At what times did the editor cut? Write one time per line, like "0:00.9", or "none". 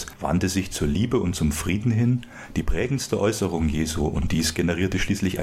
none